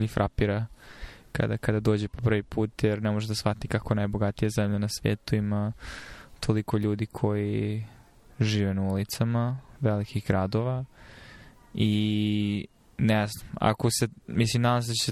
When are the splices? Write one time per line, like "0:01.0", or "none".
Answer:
none